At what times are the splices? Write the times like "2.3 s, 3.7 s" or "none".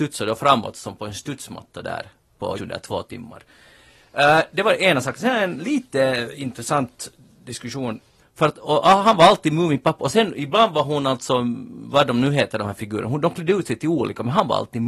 2.5 s, 8.2 s